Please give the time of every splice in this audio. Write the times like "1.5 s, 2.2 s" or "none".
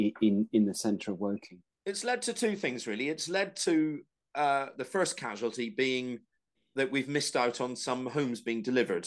1.7 s